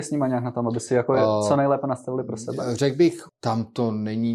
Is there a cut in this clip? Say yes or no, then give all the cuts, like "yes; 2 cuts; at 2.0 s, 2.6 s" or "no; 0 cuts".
yes; 1 cut; at 3.3 s